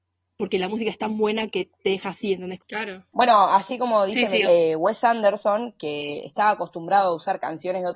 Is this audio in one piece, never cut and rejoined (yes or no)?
no